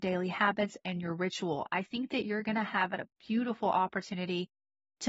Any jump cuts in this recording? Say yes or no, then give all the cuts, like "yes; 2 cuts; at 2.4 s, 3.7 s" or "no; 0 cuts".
no; 0 cuts